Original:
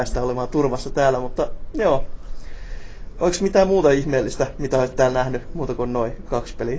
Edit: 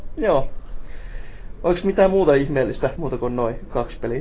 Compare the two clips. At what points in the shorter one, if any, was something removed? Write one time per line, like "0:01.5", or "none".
0:03.0